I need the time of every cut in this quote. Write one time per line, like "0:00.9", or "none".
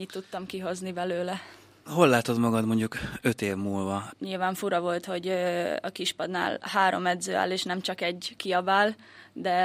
0:04.1